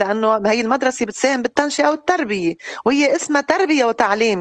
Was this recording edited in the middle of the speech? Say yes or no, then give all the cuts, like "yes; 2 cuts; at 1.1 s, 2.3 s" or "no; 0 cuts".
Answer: no; 0 cuts